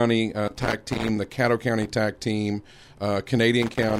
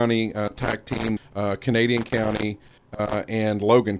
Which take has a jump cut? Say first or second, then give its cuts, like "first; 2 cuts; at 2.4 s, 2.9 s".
second; 1 cut; at 1.2 s